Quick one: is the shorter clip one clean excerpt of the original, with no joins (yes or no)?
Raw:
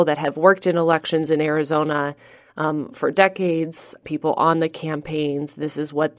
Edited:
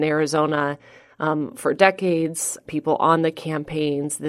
yes